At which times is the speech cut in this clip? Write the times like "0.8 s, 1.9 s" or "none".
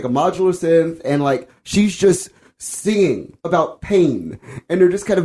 3.4 s